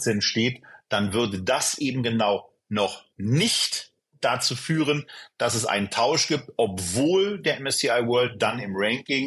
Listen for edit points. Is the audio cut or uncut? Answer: uncut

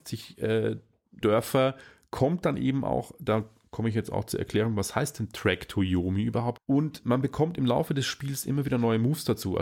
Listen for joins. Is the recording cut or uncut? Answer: cut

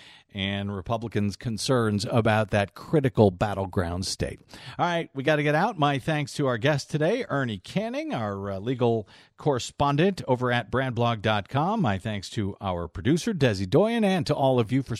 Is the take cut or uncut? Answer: uncut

